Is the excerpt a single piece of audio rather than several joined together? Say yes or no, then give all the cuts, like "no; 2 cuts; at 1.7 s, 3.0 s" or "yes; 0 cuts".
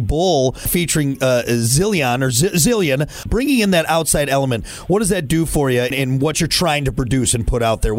no; 1 cut; at 3.3 s